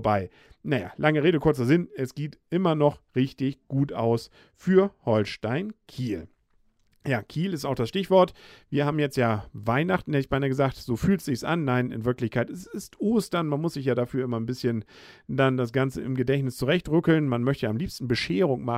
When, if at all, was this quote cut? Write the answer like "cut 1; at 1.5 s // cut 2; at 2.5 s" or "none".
none